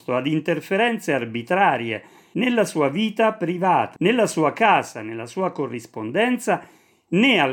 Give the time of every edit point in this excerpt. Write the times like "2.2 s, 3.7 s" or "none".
4.0 s